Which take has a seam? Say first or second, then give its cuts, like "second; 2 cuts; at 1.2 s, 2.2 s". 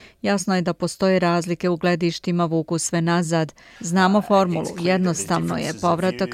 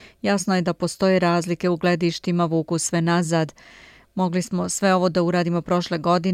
first; 1 cut; at 3.7 s